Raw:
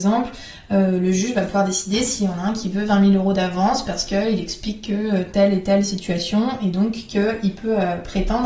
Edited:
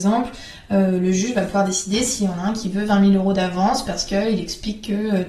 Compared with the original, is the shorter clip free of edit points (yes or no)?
yes